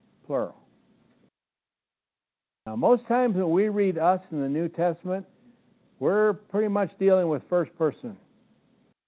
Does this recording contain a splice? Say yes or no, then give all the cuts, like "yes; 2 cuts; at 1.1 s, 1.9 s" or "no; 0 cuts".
no; 0 cuts